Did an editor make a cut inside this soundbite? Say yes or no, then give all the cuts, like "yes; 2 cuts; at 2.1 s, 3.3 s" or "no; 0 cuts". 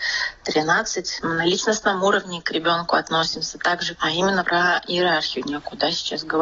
yes; 2 cuts; at 1.2 s, 3.9 s